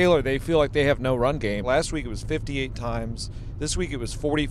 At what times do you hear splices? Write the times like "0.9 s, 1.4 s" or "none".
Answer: 1.6 s